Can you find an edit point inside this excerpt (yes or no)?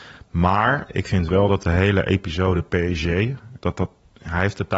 yes